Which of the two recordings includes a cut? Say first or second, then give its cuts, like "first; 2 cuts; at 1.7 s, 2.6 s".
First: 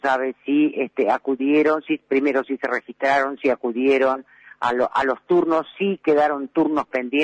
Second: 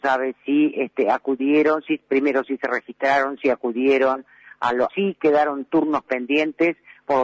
second; 1 cut; at 4.9 s